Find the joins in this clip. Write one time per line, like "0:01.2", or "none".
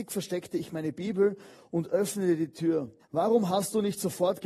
0:03.0